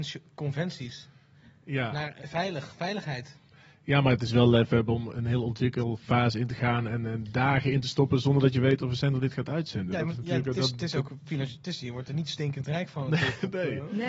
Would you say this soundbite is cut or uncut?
cut